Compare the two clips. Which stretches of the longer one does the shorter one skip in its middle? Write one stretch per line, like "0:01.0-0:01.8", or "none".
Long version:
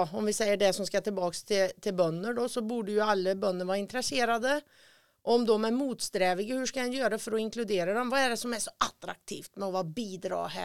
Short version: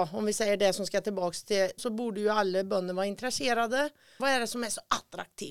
0:01.8-0:02.5
0:04.9-0:08.1